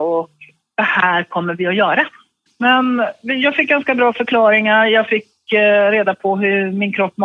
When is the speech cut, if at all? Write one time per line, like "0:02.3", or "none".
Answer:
0:02.5

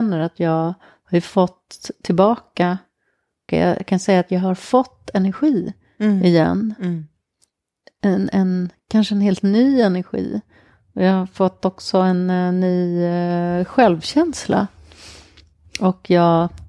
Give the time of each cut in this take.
0:03.5

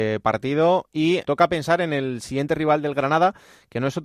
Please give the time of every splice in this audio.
0:01.2

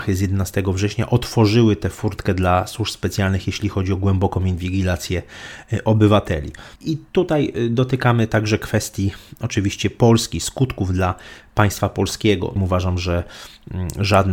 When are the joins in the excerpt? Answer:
0:06.8
0:12.6

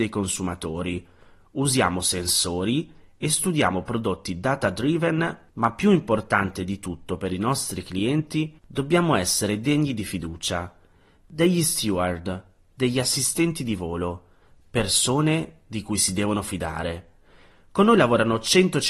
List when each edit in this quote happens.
0:08.6

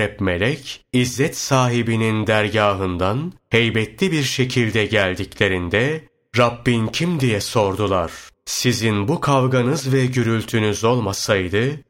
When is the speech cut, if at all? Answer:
0:08.3

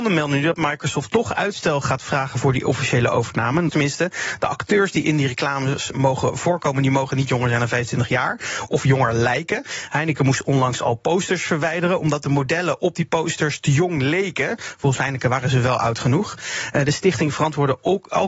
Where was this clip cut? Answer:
0:03.7

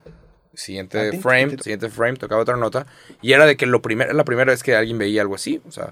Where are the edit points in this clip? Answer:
0:01.6

